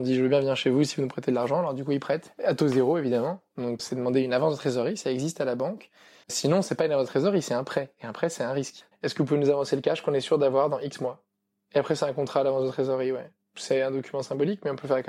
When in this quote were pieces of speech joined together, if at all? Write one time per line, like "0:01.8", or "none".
0:03.8
0:06.2
0:08.9